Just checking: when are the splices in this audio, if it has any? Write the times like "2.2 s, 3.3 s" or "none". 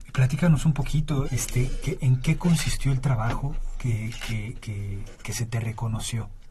1.2 s